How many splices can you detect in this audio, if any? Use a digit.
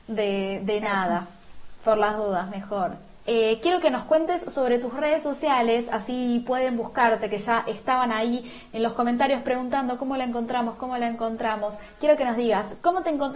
1